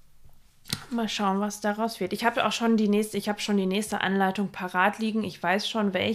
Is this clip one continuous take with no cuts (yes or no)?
yes